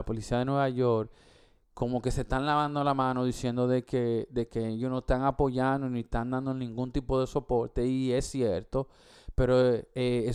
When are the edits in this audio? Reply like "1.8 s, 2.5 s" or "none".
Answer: none